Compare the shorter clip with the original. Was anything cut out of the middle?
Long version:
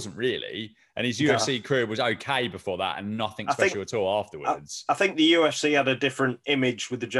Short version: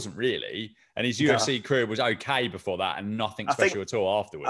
no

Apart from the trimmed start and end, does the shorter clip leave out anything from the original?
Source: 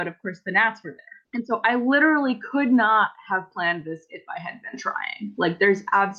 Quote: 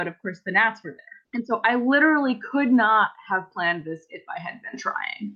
no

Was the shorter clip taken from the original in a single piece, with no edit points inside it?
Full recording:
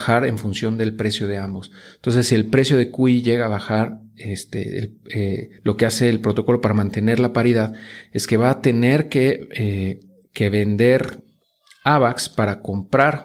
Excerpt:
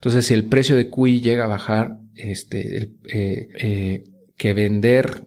no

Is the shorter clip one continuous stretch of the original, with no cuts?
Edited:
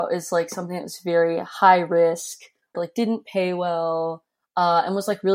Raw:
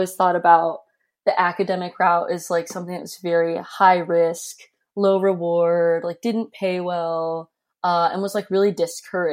no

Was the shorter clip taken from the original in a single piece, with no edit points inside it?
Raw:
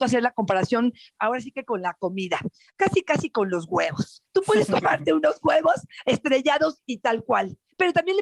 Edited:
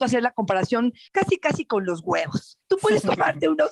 no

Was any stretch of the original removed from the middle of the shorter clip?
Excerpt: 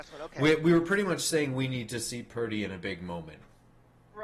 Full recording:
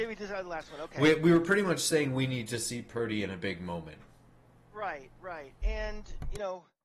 no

